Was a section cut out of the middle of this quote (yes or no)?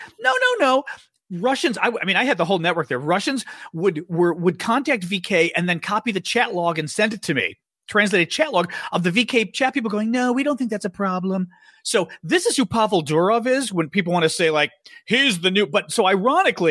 no